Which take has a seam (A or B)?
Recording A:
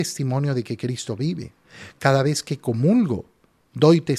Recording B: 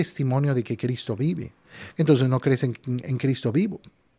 B